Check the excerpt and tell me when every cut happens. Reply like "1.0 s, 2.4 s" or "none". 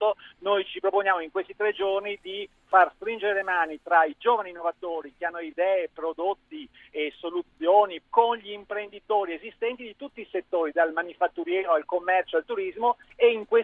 8.0 s